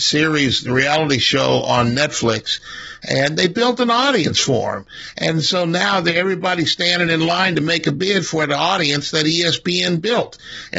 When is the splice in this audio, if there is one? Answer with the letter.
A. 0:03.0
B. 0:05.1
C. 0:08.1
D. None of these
D